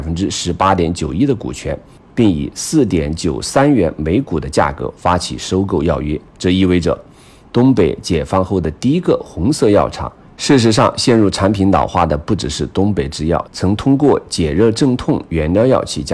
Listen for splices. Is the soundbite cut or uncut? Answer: cut